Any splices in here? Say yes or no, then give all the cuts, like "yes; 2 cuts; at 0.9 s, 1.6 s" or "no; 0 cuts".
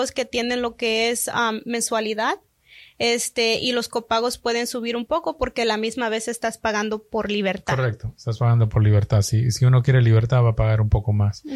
no; 0 cuts